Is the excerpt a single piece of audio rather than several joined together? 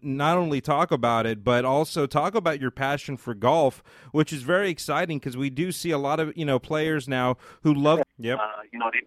no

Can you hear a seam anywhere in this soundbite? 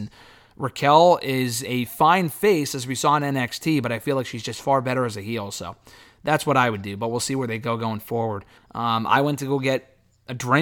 yes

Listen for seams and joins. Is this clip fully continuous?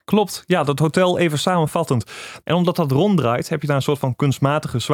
no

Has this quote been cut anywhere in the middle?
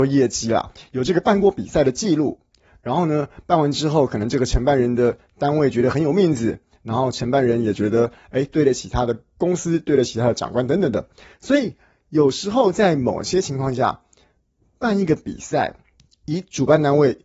no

